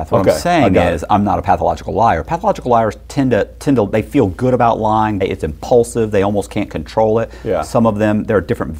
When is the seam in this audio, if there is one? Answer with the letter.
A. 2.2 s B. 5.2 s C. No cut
B